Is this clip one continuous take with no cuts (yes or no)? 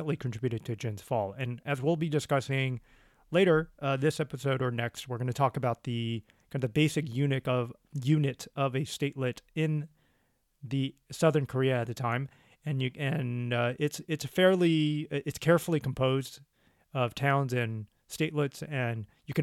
yes